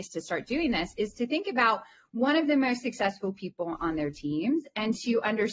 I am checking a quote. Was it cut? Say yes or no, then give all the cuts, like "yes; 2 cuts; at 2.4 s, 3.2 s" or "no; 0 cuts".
no; 0 cuts